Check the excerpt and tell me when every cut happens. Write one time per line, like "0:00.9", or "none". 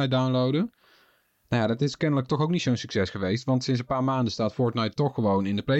none